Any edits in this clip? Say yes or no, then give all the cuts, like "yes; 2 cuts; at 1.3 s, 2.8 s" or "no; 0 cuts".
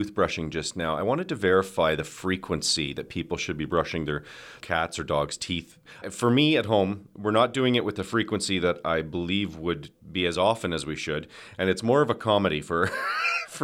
no; 0 cuts